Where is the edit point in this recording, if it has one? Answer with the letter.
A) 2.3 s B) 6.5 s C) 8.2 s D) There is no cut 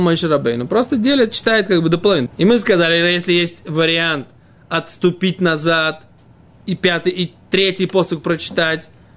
A